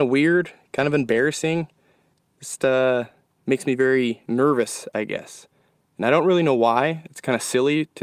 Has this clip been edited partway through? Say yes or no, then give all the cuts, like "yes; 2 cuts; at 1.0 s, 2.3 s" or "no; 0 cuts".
no; 0 cuts